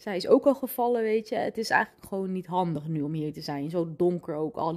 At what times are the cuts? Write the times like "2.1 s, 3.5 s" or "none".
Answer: none